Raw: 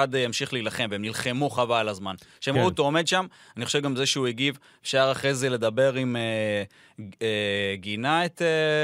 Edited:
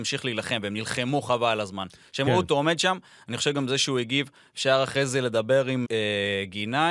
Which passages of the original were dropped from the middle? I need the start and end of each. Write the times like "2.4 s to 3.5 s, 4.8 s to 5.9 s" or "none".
6.1 s to 7.2 s